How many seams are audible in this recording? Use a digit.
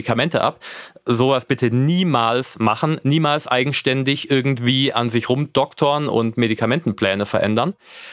0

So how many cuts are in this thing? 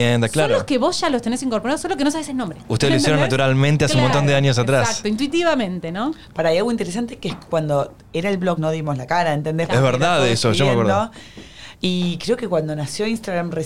1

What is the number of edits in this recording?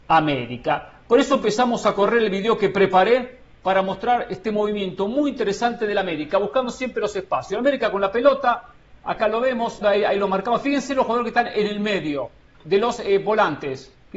2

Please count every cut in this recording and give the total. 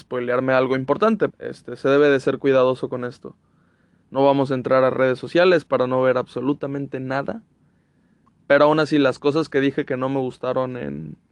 3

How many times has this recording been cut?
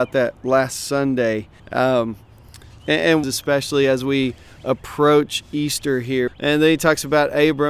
3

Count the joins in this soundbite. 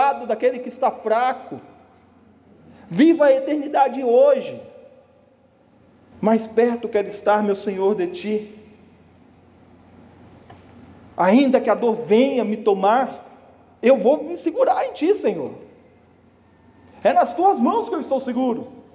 1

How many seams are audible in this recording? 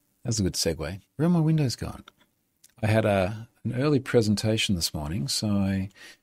1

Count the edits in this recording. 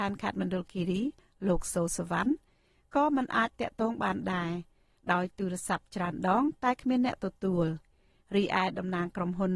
0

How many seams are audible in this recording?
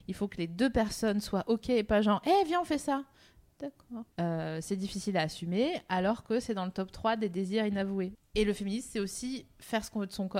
2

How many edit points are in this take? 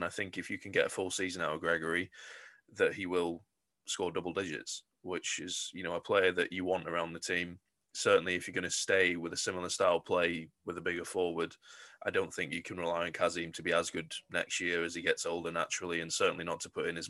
0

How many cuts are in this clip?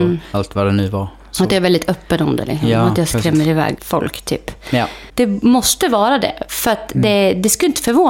1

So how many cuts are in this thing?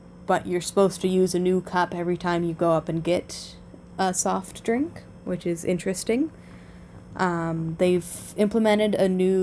0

